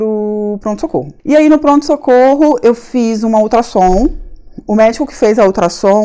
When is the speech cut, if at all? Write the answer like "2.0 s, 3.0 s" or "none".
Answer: 1.2 s